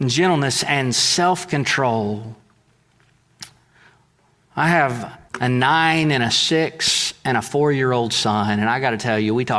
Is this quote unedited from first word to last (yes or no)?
no